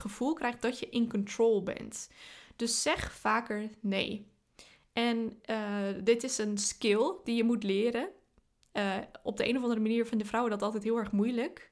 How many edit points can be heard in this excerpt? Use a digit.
0